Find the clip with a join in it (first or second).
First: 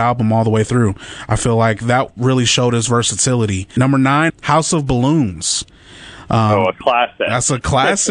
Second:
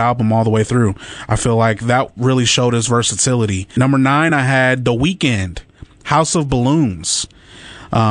first